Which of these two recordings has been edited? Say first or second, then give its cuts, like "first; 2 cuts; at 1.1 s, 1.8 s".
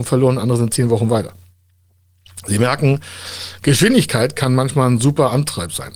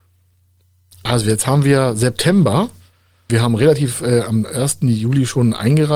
second; 1 cut; at 3.3 s